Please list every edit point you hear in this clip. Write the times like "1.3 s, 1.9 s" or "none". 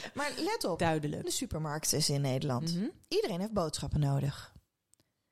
1.2 s